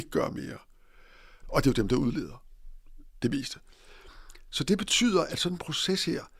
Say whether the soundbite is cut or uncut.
cut